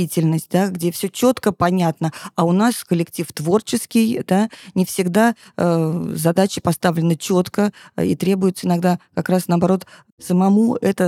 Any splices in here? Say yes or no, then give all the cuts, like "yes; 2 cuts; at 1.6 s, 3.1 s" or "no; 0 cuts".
no; 0 cuts